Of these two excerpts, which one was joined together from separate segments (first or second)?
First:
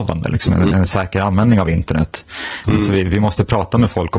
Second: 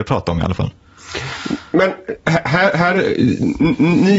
first